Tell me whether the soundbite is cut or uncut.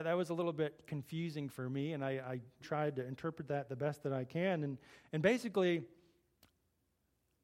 cut